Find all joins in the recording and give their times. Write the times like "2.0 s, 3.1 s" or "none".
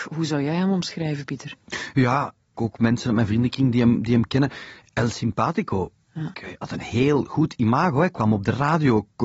2.5 s, 6.3 s

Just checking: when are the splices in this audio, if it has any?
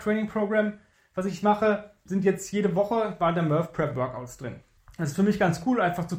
2.1 s

